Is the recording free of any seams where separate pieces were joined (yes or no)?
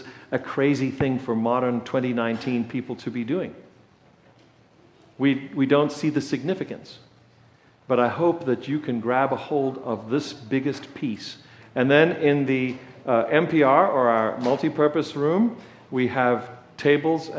no